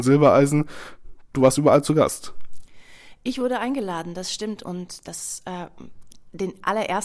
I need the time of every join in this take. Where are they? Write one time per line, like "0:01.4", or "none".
none